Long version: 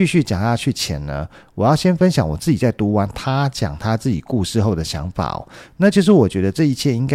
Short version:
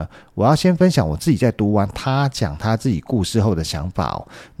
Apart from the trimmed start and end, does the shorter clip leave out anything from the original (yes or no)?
no